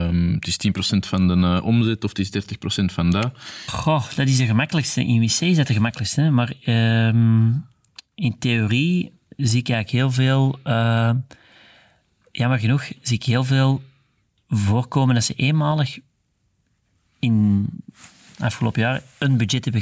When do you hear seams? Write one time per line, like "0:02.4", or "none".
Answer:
0:03.7